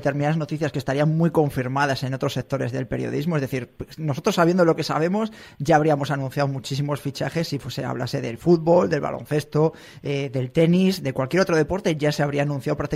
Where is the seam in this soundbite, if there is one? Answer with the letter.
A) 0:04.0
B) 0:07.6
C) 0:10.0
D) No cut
D